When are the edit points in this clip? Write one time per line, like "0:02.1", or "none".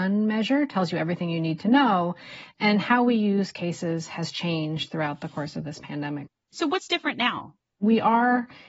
none